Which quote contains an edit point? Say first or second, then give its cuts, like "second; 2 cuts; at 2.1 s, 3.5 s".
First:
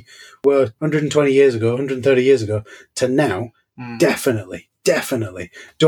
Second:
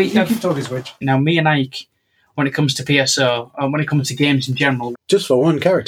second; 2 cuts; at 1.0 s, 4.9 s